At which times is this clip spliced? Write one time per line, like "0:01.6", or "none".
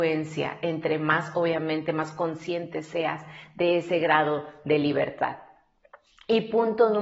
none